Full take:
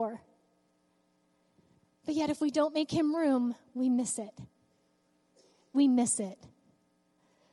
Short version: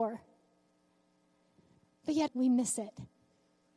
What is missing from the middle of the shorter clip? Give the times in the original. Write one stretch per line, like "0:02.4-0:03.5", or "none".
0:02.3-0:03.7